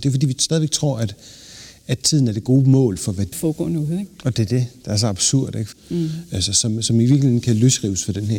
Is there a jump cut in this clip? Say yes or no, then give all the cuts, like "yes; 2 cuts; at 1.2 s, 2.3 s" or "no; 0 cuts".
yes; 2 cuts; at 3.3 s, 5.7 s